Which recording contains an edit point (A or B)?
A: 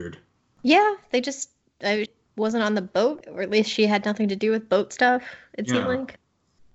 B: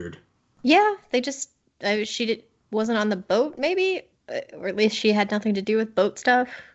A